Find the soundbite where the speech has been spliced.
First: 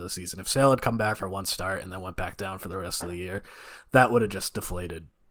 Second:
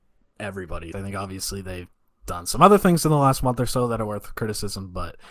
second; 1 cut; at 0.9 s

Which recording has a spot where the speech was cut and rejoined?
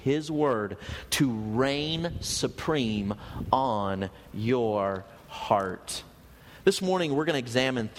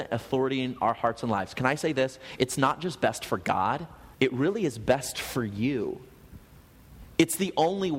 second; 1 cut; at 4.1 s

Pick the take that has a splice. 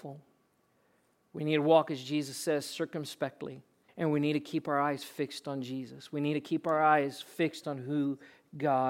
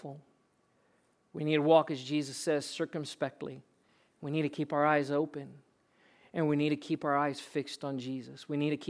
first; 1 cut; at 3.9 s

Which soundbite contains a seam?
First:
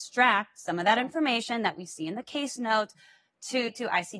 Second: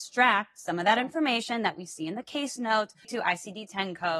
second; 1 cut; at 3.0 s

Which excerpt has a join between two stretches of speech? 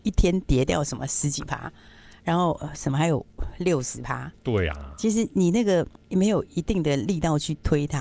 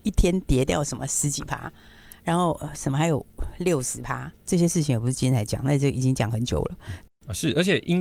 second; 2 cuts; at 4.4 s, 7.1 s

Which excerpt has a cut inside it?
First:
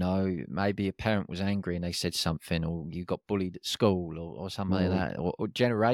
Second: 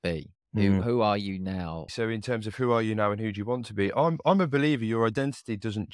second; 1 cut; at 1.9 s

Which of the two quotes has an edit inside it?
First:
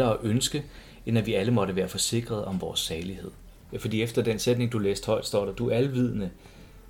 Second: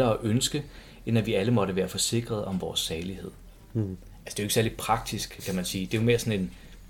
first; 1 cut; at 3.6 s

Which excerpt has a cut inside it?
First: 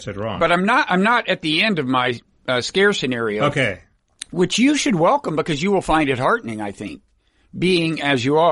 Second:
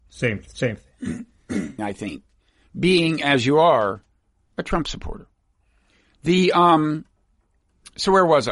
second; 1 cut; at 1.8 s

